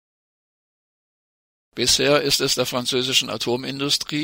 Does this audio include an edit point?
yes; 1 cut; at 1.7 s

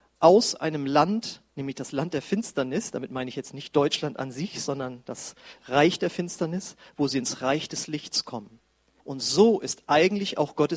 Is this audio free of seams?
no; 2 cuts; at 1.5 s, 9.0 s

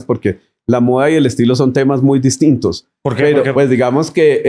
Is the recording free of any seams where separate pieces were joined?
no; 1 cut; at 3.5 s

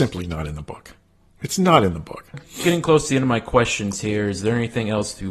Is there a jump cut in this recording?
no; 0 cuts

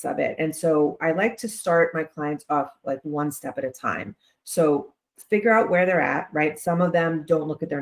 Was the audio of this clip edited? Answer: no; 0 cuts

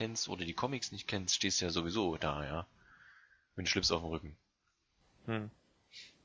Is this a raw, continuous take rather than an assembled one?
yes; 0 cuts

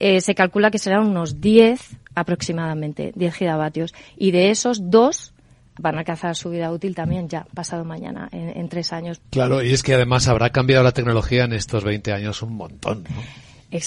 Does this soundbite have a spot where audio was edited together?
yes; 2 cuts; at 5.8 s, 9.2 s

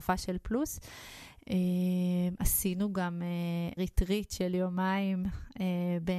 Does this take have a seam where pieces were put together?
yes; 1 cut; at 3.8 s

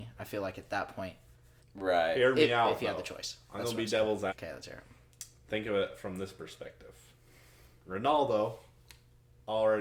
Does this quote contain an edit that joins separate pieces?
yes; 2 cuts; at 1.6 s, 4.3 s

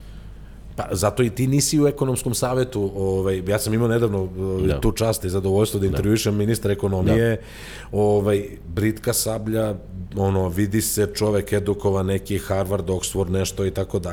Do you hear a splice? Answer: no; 0 cuts

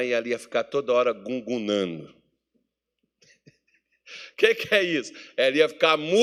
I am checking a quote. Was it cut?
no; 0 cuts

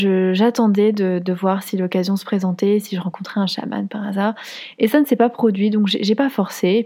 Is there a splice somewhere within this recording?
no; 0 cuts

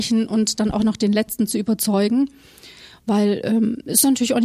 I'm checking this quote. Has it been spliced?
no; 0 cuts

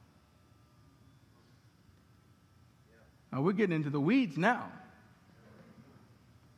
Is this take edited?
no; 0 cuts

